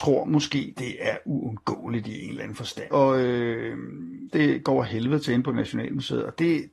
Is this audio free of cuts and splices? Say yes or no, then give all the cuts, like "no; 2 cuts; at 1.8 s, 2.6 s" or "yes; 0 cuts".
no; 2 cuts; at 2.9 s, 4.3 s